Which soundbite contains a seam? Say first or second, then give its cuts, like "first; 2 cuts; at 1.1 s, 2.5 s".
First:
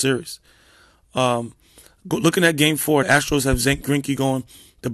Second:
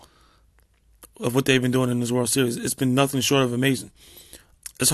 first; 1 cut; at 3.0 s